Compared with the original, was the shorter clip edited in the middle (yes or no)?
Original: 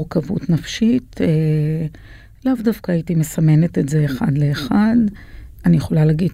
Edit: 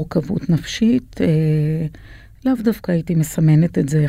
no